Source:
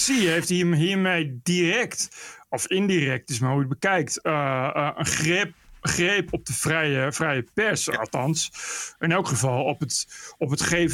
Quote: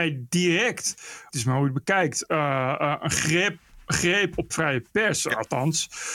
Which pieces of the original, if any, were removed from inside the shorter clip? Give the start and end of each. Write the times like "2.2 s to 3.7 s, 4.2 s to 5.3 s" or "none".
2.4 s to 3.3 s, 6.5 s to 7.1 s